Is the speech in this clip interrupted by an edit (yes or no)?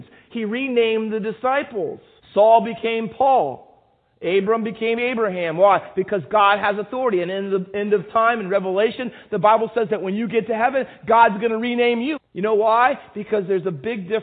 yes